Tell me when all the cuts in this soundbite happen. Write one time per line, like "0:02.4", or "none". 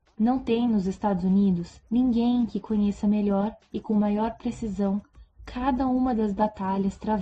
0:01.8